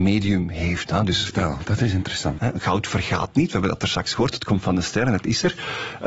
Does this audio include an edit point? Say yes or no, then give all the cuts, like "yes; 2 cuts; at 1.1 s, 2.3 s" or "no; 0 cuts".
yes; 1 cut; at 2.4 s